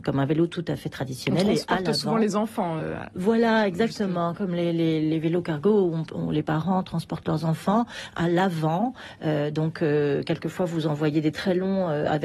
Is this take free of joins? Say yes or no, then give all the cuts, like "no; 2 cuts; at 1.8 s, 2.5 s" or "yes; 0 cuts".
yes; 0 cuts